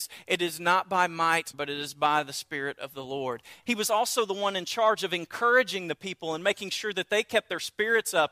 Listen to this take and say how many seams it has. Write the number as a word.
two